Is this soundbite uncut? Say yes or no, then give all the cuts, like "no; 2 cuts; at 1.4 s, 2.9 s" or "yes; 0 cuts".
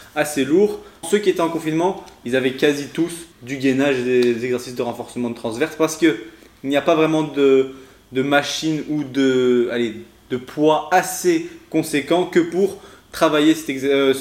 no; 2 cuts; at 1.0 s, 3.3 s